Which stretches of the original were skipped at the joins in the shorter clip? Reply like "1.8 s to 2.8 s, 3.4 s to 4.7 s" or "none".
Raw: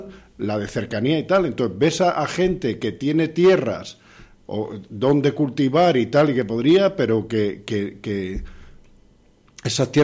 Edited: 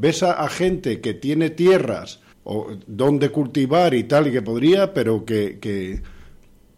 4.1 s to 4.3 s, 7.6 s to 8.0 s